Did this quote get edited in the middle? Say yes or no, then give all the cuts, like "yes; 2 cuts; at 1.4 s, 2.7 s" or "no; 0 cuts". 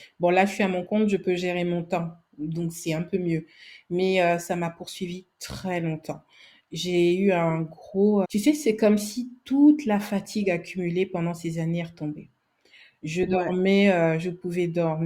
yes; 1 cut; at 8.2 s